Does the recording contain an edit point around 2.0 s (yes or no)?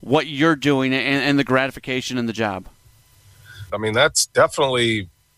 no